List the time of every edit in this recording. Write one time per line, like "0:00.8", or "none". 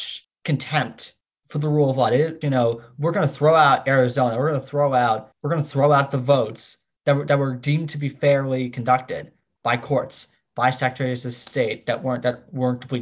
0:02.4